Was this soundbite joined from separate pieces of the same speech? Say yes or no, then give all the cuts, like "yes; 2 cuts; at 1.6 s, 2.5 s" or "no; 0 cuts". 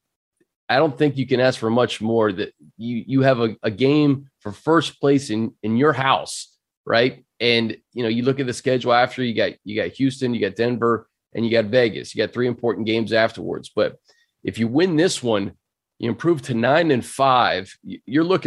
no; 0 cuts